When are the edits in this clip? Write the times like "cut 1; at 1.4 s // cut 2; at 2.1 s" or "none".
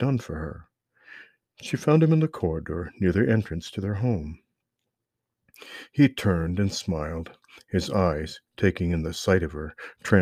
none